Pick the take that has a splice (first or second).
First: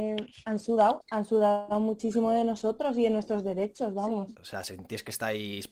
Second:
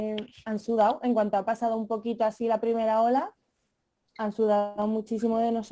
first